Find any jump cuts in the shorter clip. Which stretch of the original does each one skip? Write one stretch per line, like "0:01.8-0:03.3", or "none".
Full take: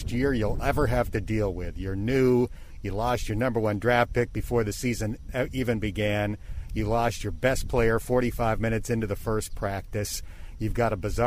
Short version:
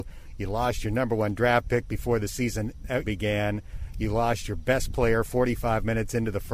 0:05.5-0:05.8

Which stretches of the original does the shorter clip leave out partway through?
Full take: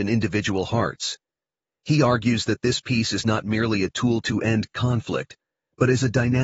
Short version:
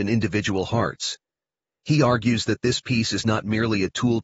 none

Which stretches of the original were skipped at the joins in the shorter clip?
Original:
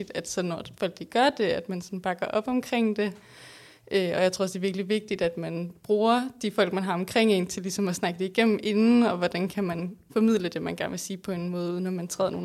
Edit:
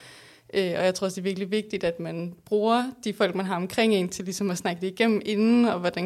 none

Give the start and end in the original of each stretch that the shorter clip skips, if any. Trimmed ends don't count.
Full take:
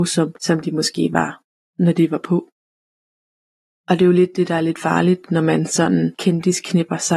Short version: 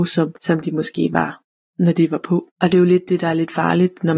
0:02.5-0:03.8

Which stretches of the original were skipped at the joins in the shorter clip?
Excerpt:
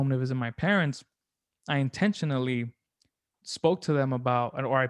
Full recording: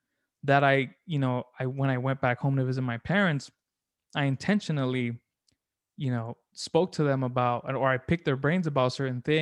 0:05.8-0:06.4

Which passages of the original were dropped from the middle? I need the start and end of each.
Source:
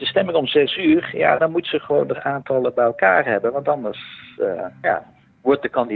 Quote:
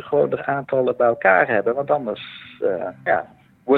none

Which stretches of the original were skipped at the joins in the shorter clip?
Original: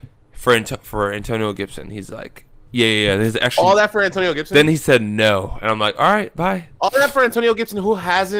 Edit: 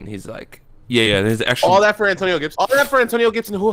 0:02.9-0:03.0
0:04.5-0:06.8

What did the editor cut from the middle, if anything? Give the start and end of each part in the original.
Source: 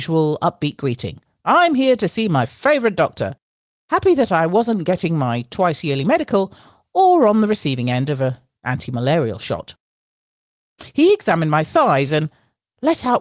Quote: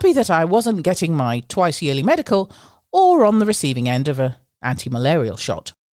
none

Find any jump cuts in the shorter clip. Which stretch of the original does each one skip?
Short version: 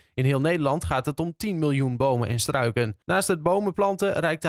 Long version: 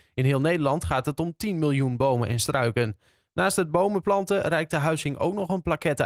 0:03.0-0:03.3

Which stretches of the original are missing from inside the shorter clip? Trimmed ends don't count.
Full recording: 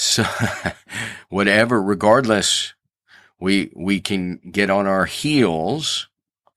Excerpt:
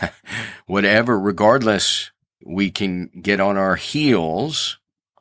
0:03.0-0:03.7

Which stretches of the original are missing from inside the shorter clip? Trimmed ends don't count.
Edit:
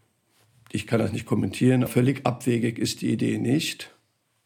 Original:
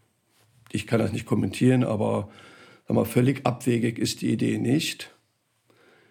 0:01.9-0:03.1

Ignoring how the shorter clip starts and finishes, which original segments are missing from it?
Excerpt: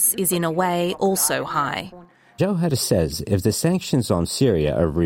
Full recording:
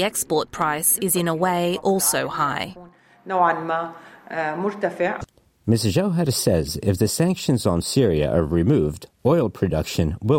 0:03.2-0:05.9

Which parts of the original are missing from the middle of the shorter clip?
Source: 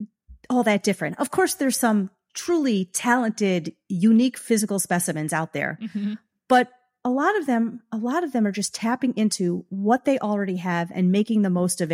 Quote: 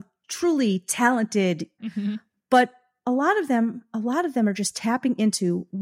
0:03.8-0:05.8

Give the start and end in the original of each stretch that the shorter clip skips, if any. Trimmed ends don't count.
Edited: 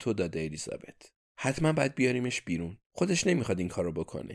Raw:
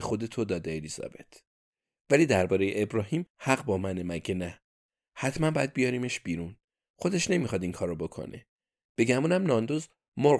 0:01.7-0:05.1
0:06.6-0:06.9

